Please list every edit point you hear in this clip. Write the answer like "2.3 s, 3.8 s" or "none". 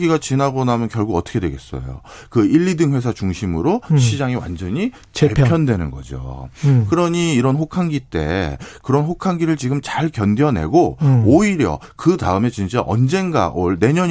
none